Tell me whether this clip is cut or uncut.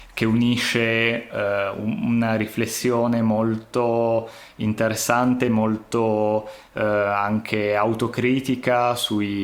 uncut